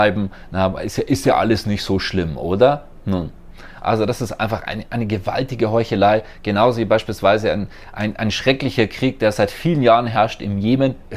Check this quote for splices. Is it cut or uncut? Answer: uncut